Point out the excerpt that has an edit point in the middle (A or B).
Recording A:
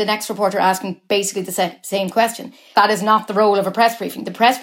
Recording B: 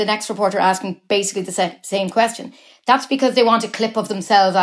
A